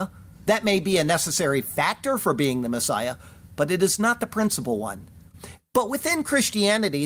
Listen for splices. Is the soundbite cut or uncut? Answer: cut